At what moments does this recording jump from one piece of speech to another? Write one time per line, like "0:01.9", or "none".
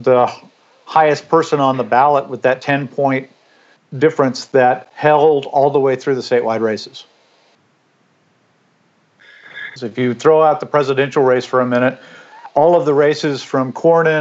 0:09.8